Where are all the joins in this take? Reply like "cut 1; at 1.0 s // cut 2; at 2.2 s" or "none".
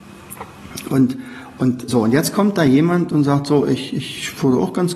cut 1; at 1.9 s